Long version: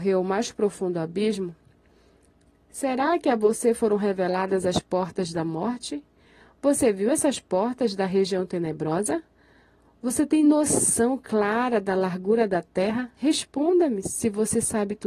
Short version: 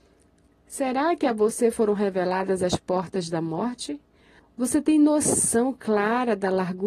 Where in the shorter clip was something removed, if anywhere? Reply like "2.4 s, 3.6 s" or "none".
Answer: 4.4 s